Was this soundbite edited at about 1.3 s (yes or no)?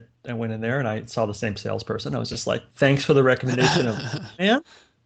no